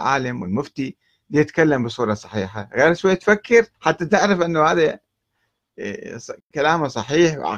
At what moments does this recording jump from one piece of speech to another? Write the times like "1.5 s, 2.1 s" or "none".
3.7 s